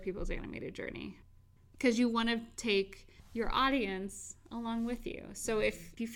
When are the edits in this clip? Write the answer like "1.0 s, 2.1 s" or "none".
none